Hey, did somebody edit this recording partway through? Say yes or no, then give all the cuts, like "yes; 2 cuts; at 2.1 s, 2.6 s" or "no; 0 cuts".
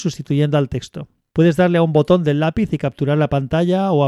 no; 0 cuts